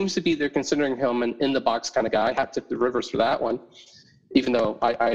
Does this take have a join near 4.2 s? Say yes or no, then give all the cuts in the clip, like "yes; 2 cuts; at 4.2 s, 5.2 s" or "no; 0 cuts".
no; 0 cuts